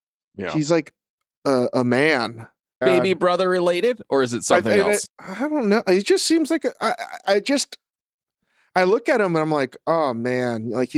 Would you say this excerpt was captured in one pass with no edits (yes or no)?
no